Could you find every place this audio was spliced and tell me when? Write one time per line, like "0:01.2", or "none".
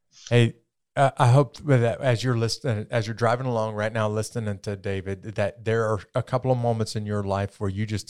none